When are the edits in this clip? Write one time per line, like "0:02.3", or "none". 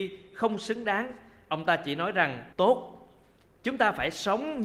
0:02.5

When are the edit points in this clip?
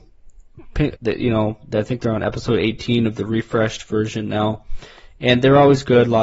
0:01.0

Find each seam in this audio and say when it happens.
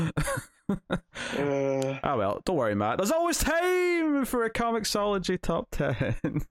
none

